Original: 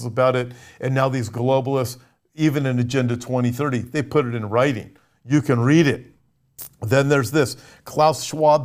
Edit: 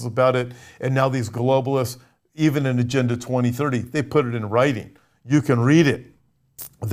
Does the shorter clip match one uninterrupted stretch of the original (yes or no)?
yes